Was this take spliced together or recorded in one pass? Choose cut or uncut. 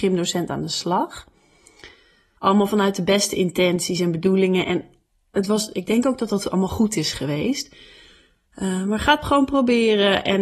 cut